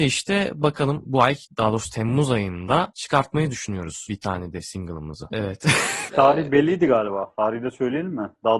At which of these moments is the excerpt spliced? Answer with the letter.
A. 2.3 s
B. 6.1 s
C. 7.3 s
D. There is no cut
B